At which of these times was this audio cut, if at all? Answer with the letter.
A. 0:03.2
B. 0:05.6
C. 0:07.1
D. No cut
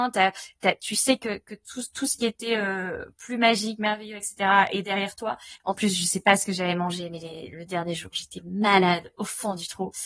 B